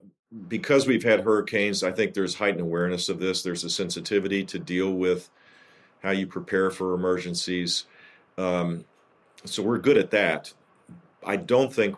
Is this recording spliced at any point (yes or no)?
no